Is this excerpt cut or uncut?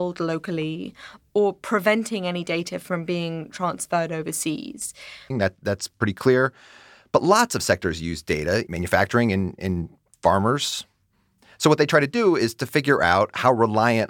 cut